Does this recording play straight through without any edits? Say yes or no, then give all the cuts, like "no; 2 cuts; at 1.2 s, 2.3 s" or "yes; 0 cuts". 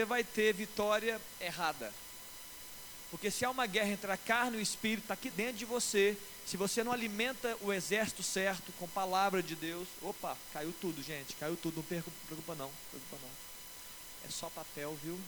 no; 1 cut; at 5.3 s